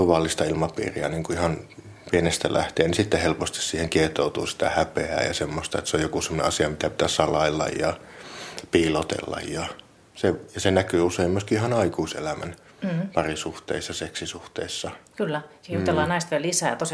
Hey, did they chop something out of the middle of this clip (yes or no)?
no